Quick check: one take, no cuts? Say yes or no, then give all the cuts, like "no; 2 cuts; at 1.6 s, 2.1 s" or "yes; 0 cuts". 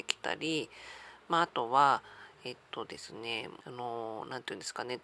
no; 1 cut; at 3.6 s